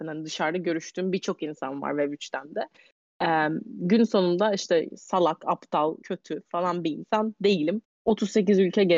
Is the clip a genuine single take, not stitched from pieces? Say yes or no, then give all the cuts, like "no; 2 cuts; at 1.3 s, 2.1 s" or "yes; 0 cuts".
no; 2 cuts; at 6.0 s, 7.8 s